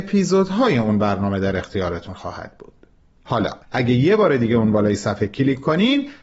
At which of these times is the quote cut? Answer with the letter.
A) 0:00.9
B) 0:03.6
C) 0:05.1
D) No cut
B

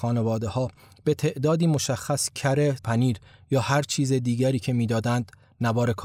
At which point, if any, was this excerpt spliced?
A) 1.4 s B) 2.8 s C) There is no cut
B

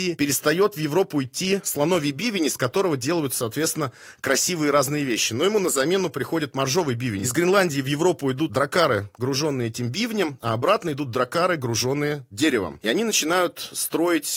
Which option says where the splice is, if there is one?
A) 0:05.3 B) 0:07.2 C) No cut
C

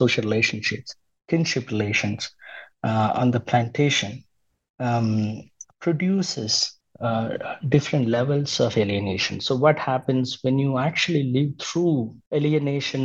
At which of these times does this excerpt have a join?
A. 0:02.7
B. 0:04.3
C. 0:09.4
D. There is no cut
D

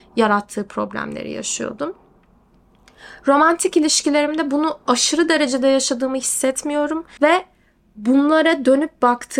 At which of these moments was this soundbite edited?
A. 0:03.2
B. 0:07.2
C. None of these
B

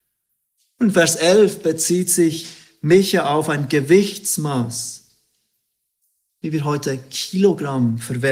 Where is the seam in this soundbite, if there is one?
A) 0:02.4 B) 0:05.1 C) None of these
C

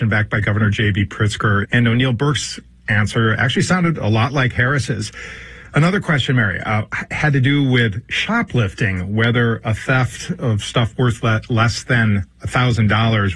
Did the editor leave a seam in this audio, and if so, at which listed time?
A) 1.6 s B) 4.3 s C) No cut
A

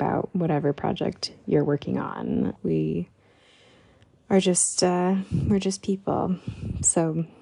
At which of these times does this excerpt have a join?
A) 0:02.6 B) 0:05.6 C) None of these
A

